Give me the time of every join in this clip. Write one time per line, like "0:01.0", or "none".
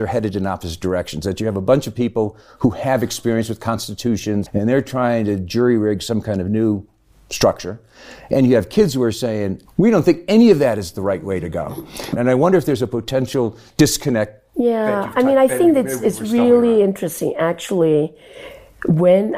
0:04.5
0:09.7